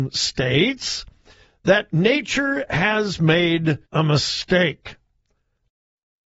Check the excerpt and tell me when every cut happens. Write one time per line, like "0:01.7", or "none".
0:03.9